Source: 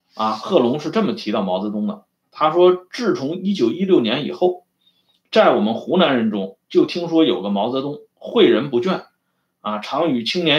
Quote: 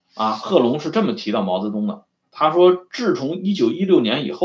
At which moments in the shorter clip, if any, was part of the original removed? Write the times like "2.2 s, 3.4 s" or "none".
none